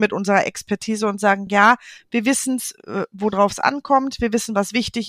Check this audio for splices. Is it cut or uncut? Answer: uncut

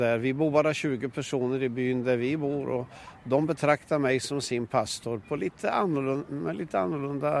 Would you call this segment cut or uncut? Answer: uncut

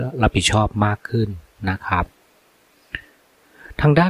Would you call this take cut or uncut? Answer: uncut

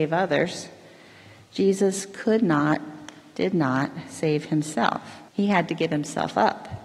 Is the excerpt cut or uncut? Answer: cut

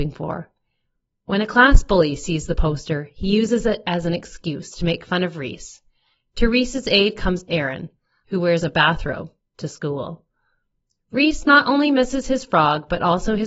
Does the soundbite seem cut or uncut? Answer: cut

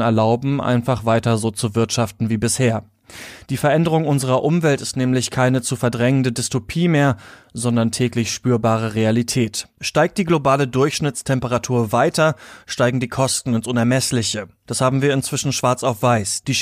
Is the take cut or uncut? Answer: uncut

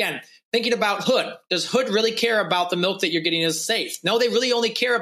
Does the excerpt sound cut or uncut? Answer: uncut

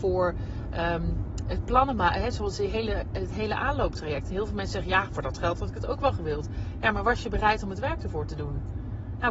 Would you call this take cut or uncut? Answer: uncut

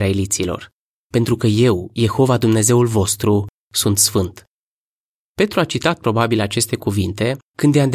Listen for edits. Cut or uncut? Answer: cut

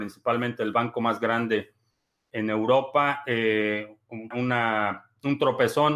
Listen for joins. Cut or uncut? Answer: cut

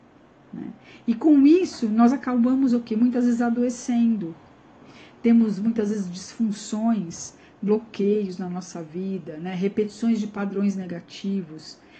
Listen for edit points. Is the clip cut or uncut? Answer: uncut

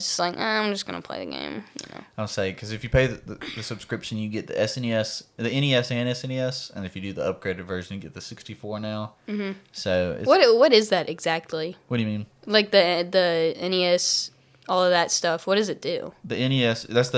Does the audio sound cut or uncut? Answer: uncut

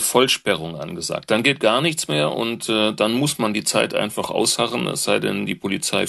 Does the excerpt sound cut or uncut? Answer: uncut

